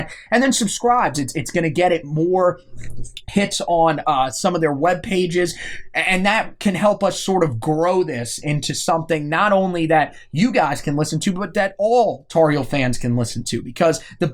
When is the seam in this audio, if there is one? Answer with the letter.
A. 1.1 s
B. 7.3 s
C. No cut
A